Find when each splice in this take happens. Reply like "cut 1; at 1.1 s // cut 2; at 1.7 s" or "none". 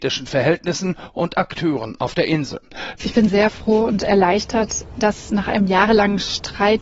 cut 1; at 3.0 s